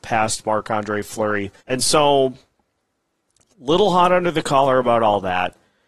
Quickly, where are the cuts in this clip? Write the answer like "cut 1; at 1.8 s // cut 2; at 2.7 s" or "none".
cut 1; at 1.6 s